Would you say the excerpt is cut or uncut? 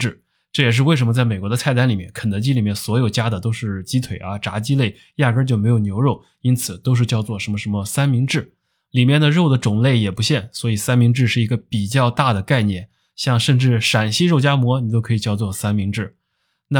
cut